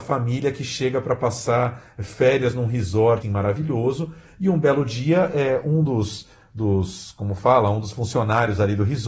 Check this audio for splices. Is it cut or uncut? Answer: cut